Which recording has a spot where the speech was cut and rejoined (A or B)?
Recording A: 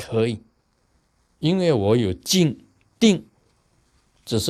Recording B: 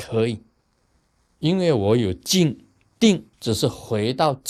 B